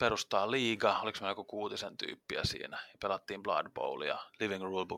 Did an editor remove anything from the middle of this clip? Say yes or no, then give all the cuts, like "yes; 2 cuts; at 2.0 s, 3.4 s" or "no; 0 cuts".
no; 0 cuts